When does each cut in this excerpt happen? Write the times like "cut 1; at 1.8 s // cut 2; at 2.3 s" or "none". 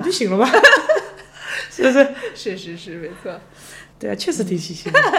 cut 1; at 3.9 s